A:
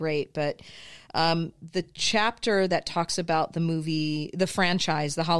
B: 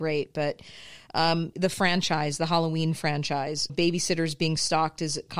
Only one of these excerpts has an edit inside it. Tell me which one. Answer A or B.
B